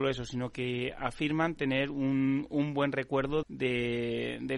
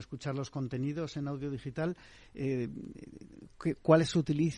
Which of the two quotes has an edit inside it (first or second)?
first